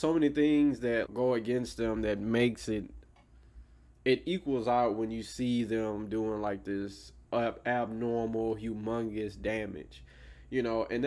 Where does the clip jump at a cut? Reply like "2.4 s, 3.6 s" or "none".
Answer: 1.1 s